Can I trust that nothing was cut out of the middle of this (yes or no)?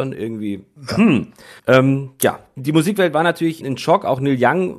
no